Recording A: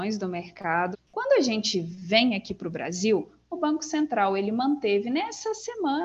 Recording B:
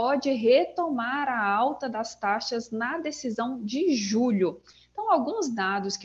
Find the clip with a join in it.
A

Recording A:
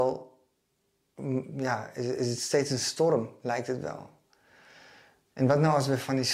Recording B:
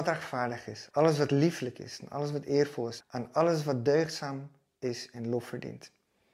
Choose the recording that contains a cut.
B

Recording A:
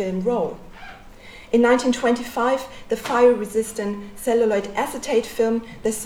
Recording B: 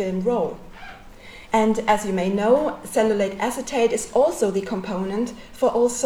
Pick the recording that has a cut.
B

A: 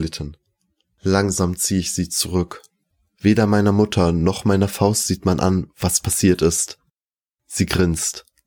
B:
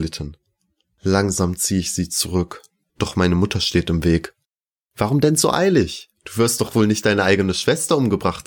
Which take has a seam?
B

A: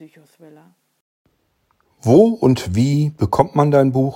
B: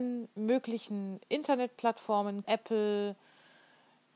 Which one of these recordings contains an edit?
B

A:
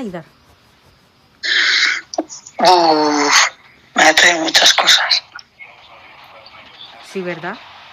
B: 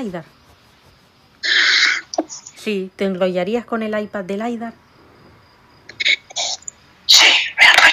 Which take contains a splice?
B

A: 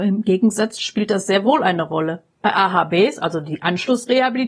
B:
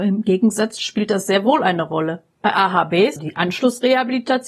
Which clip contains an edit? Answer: B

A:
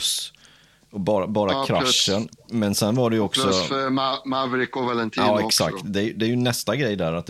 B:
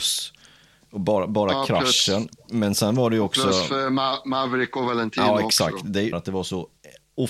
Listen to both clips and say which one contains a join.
B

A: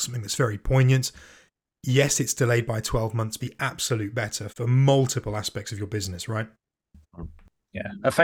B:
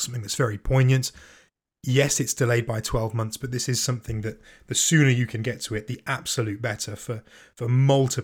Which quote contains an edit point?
A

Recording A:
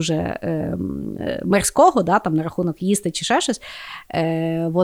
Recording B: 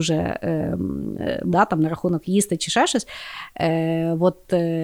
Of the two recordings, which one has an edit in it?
B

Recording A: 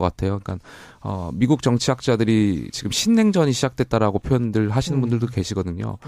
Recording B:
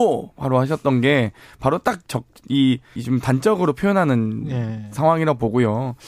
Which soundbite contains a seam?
B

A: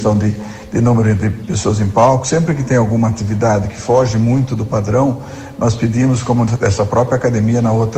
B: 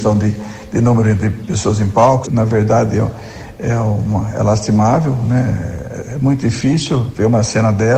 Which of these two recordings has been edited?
B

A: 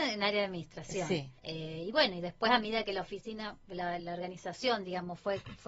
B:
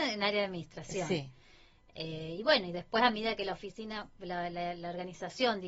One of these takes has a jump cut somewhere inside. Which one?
A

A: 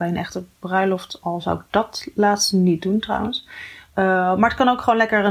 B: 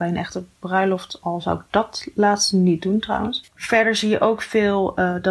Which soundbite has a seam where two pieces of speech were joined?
B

